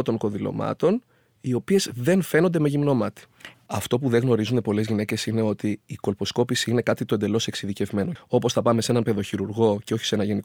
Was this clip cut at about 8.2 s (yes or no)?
yes